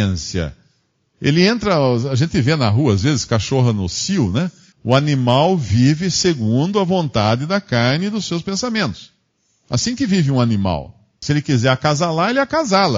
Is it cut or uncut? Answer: cut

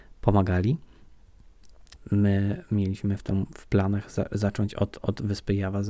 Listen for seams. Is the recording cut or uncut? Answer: cut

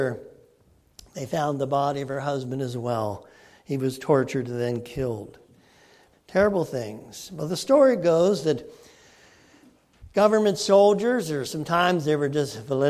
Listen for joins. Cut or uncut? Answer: cut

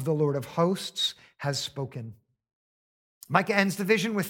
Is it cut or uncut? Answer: uncut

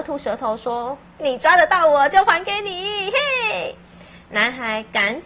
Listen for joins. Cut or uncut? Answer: cut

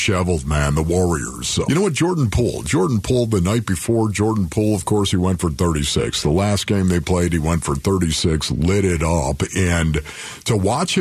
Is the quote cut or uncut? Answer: cut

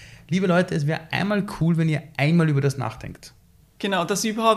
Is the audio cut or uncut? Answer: cut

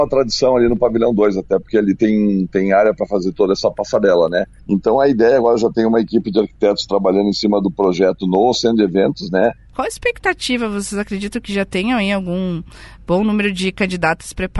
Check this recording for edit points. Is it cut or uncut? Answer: cut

